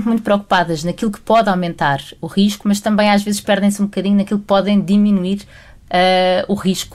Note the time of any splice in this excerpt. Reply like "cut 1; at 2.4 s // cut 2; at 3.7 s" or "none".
none